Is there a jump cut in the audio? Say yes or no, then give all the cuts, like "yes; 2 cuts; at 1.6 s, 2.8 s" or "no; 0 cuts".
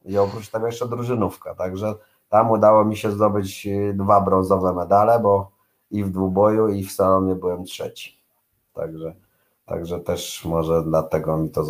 no; 0 cuts